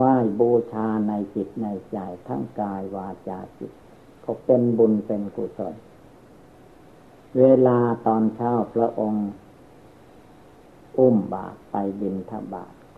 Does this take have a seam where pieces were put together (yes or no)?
no